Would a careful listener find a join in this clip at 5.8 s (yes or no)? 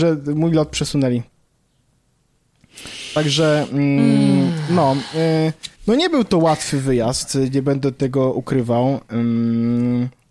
yes